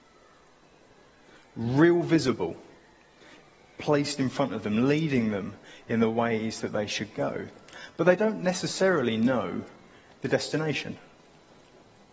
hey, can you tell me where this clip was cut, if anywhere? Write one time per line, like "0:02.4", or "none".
none